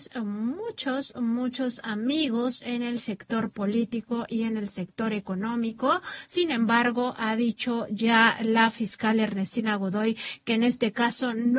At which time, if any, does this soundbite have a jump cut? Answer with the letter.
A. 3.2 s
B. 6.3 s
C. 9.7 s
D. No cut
D